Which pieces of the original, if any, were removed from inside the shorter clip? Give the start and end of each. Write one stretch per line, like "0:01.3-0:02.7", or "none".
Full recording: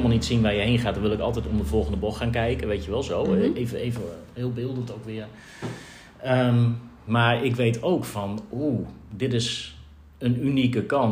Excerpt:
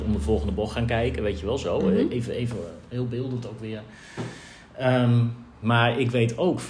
none